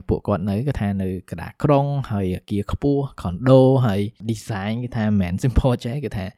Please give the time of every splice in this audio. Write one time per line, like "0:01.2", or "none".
0:05.4

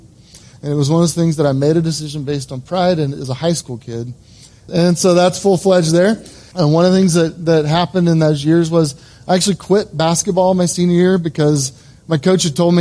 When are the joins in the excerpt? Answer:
0:04.7
0:06.5

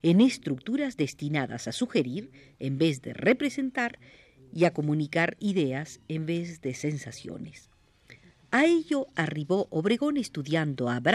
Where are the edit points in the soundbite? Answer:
none

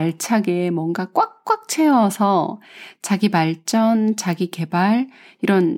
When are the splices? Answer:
none

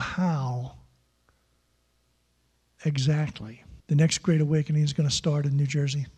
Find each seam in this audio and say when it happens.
0:03.8

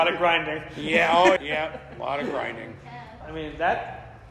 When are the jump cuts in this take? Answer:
0:01.4
0:03.2

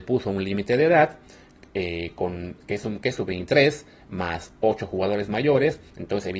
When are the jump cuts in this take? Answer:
none

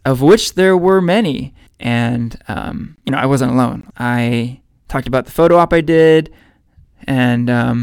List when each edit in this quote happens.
0:01.7
0:03.9
0:06.8

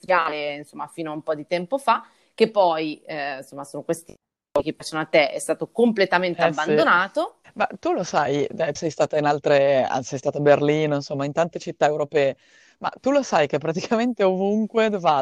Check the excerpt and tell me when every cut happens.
0:07.4
0:08.8

